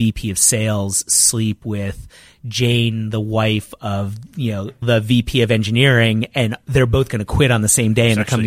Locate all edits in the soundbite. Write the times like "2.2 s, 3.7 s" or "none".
4.8 s